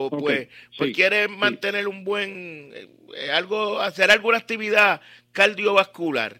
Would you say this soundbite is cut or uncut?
uncut